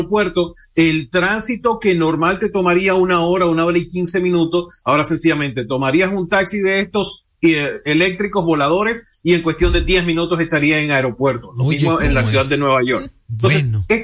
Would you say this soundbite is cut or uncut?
uncut